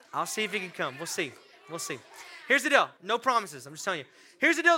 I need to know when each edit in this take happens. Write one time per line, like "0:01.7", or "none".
0:03.0